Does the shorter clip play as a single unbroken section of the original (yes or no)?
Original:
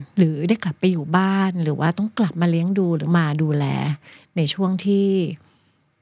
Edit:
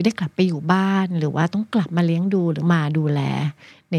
yes